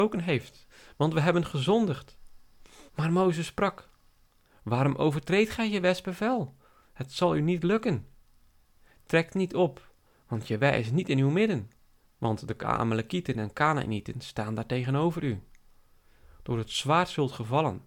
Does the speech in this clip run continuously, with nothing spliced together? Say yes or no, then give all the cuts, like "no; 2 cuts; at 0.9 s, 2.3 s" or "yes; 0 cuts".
no; 2 cuts; at 2.9 s, 12.0 s